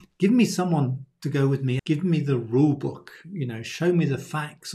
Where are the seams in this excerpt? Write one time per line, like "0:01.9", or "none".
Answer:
0:01.8